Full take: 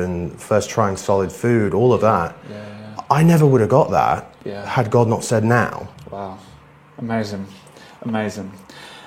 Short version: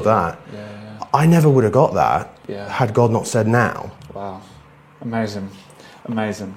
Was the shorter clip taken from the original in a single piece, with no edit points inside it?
yes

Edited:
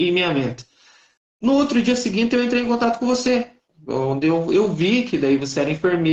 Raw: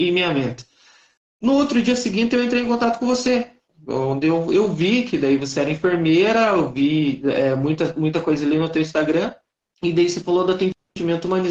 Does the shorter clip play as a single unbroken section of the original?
yes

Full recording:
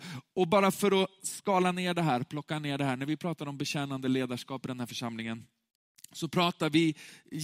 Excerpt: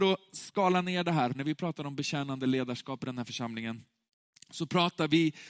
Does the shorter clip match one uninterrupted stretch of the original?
no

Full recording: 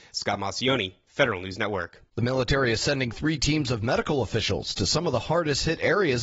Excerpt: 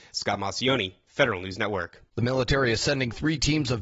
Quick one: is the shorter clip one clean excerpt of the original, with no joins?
yes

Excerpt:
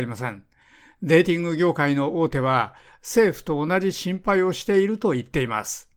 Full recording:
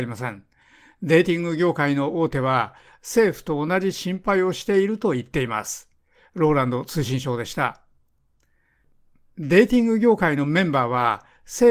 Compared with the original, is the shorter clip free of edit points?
yes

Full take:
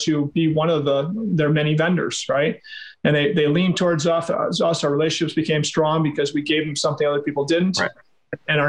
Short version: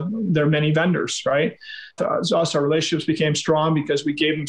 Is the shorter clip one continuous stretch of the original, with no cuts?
no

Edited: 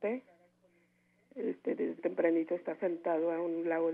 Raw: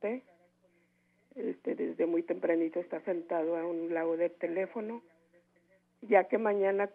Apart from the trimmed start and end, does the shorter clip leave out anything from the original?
yes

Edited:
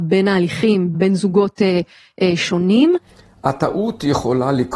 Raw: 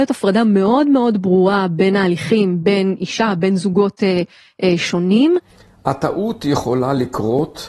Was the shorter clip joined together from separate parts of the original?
yes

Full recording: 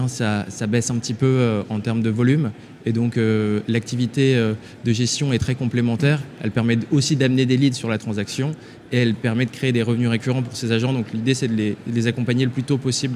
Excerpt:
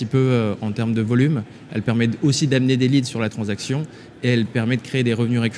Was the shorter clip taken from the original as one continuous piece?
no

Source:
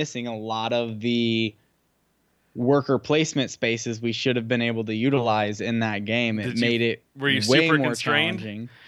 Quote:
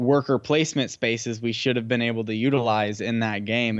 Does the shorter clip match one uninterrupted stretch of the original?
yes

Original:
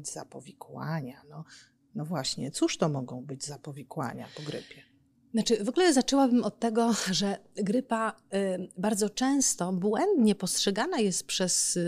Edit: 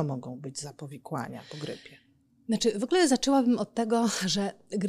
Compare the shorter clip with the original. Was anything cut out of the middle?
no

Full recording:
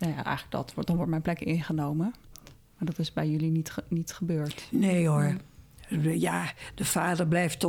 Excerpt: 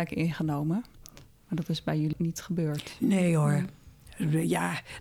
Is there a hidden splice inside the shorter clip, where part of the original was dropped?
yes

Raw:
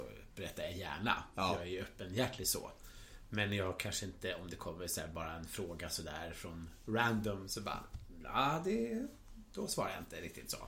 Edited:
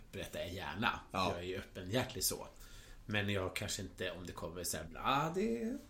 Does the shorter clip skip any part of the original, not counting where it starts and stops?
yes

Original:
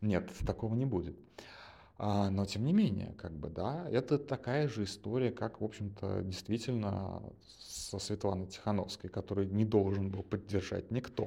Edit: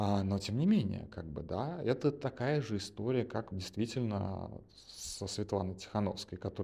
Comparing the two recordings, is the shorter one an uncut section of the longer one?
no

